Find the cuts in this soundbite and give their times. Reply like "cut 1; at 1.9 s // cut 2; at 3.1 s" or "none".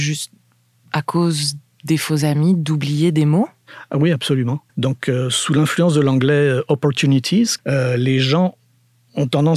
cut 1; at 4.7 s // cut 2; at 7.6 s